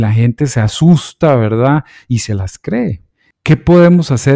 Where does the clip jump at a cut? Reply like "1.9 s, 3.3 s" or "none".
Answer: none

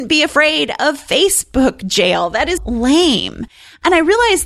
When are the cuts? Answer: 2.6 s

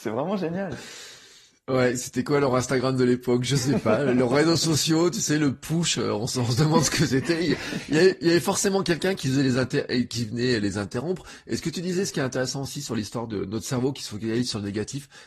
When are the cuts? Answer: none

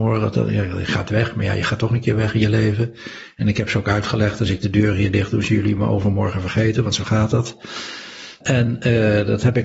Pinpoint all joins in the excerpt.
none

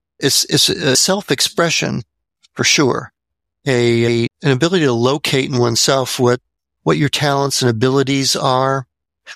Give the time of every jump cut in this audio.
4.3 s

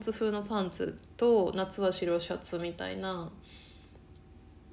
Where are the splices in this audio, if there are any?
none

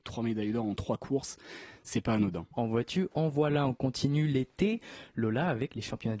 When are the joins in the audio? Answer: 2.5 s

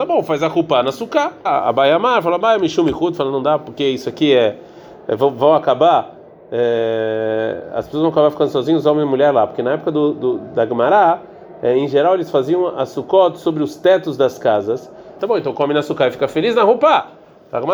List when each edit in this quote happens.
1.5 s, 15.2 s

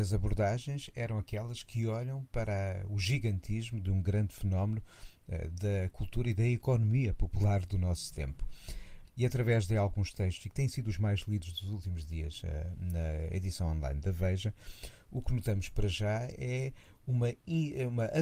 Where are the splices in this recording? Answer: 9.0 s

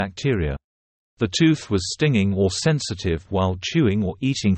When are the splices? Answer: 1.0 s

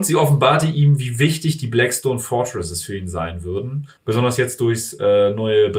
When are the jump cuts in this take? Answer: 4.0 s

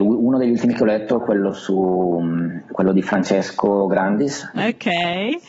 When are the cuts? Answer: 4.6 s

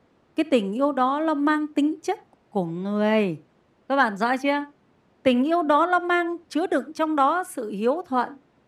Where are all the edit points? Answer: 2.3 s, 6.4 s

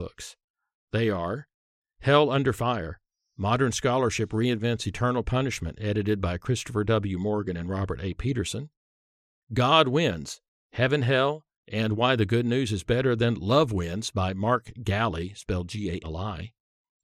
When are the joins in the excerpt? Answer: 16.0 s

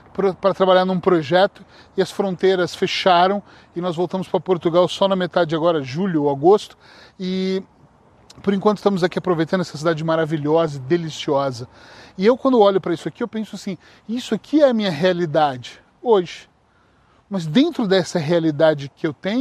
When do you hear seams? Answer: none

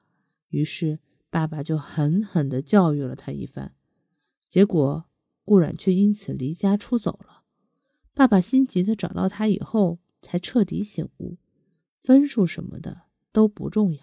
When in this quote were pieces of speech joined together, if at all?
none

